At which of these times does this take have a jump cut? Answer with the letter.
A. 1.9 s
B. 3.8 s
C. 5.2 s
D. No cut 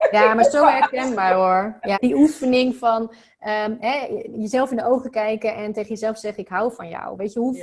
A